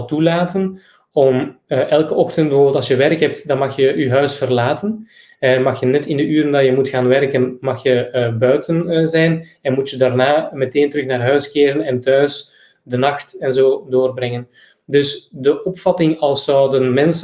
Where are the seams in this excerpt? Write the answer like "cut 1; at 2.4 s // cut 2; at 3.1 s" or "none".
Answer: none